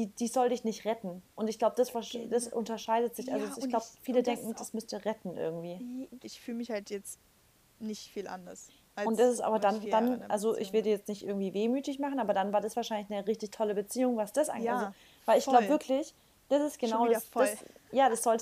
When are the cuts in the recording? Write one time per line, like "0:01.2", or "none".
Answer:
0:06.2